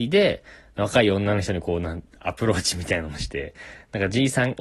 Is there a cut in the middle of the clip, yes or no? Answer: no